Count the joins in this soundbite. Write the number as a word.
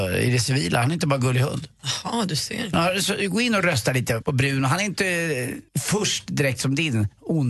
two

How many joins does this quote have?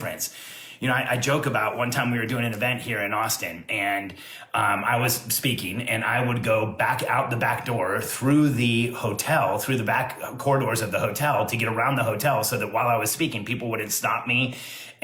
zero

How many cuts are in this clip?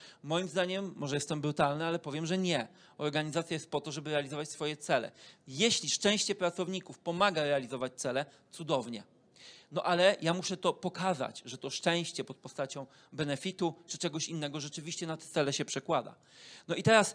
zero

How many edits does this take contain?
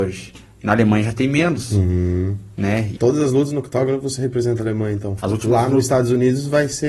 two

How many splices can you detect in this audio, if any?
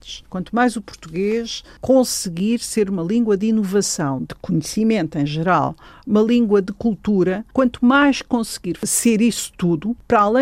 one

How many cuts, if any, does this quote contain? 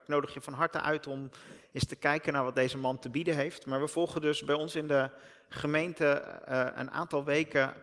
zero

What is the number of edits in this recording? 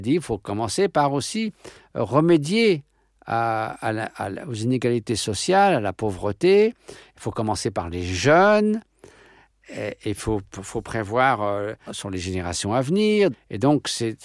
two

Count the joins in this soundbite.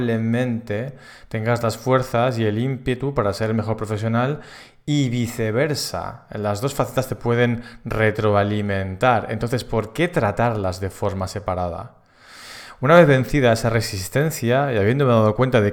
zero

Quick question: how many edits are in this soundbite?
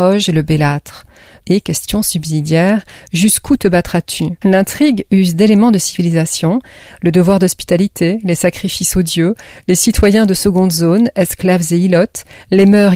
two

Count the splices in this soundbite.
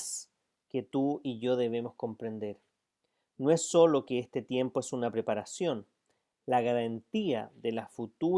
one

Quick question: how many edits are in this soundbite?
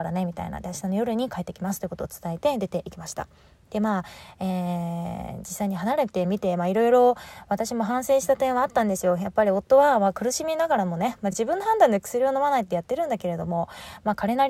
zero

